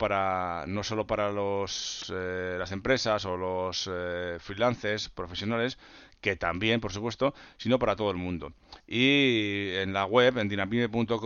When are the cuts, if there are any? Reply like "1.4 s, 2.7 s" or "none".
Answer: 8.8 s